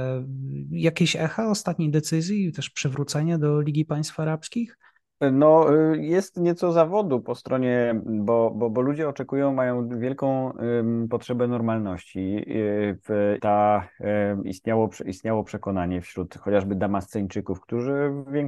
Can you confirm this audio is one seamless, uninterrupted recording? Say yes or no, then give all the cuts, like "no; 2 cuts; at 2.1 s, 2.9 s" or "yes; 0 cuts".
no; 1 cut; at 13.4 s